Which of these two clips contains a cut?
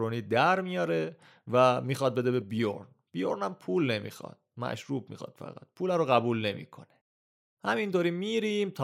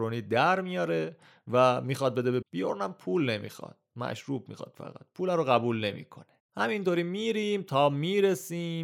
second; 2 cuts; at 2.4 s, 6.4 s

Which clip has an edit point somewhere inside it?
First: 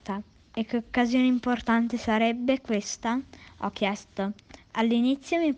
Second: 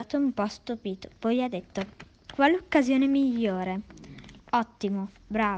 second; 2 cuts; at 2.3 s, 4.4 s

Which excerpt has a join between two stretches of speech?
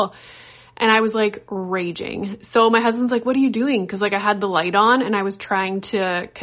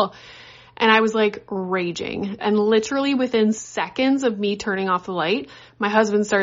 second; 1 cut; at 2.4 s

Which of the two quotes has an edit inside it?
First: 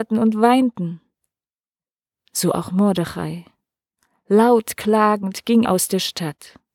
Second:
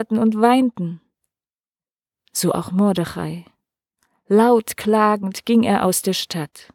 first; 1 cut; at 5.7 s

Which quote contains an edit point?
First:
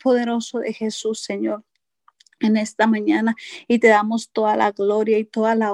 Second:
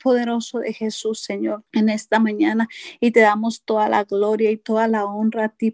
second; 1 cut; at 1.7 s

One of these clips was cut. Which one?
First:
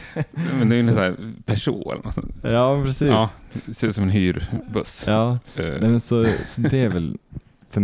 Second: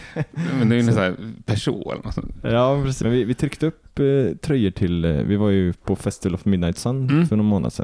second; 1 cut; at 3.0 s

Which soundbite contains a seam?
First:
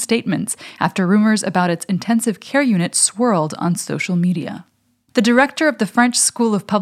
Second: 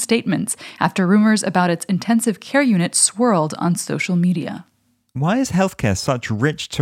first; 1 cut; at 5.1 s

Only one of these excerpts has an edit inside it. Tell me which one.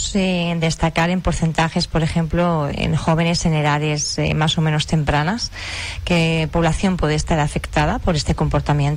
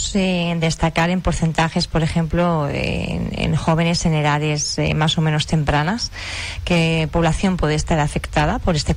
first; 1 cut; at 2.7 s

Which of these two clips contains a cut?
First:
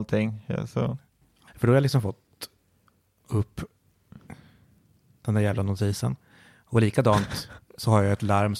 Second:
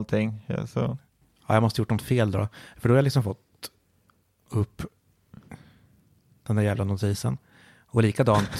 first; 1 cut; at 1.5 s

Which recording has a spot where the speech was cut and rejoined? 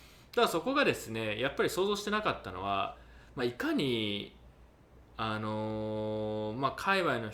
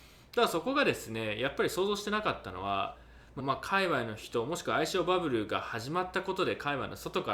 second; 1 cut; at 3.4 s

